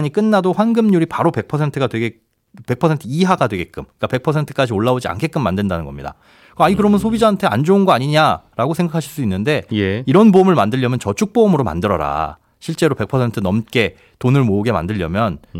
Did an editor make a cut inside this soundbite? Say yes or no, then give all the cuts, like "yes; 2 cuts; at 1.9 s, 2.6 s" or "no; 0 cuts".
no; 0 cuts